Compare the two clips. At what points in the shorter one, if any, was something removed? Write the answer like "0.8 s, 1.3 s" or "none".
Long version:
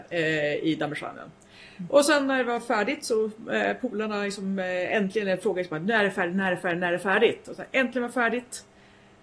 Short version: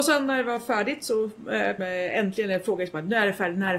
1.8 s